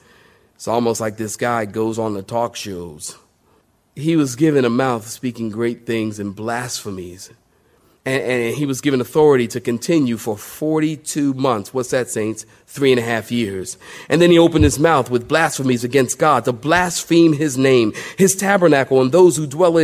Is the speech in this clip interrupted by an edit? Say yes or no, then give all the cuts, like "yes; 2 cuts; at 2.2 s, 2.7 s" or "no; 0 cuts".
no; 0 cuts